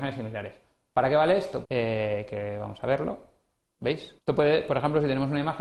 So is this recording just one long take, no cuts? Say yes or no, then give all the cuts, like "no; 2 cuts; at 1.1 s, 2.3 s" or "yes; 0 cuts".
no; 2 cuts; at 1.6 s, 4.2 s